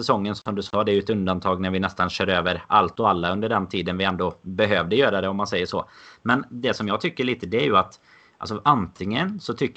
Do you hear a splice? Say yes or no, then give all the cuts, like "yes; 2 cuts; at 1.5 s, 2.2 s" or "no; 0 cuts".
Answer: no; 0 cuts